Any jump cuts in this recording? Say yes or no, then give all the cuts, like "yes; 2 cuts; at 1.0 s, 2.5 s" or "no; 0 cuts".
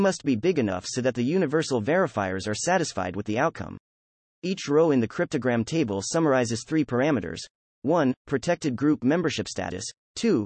no; 0 cuts